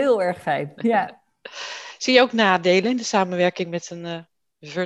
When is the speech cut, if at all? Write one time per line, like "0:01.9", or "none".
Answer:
none